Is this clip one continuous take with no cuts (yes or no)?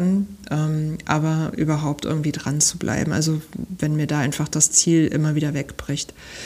yes